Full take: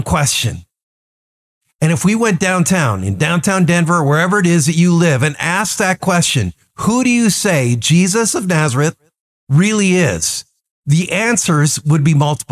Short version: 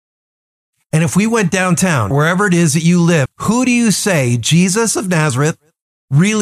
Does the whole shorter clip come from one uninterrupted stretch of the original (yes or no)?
no